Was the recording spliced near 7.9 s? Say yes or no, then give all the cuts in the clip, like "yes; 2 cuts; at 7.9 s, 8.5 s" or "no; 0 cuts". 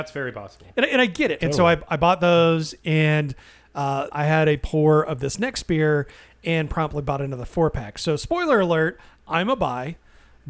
no; 2 cuts; at 1.4 s, 4.1 s